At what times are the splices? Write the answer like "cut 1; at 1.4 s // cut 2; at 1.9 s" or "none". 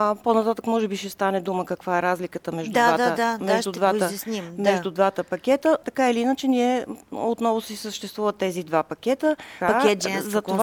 cut 1; at 5.8 s // cut 2; at 9.6 s